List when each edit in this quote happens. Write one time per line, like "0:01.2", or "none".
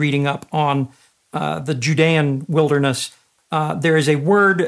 none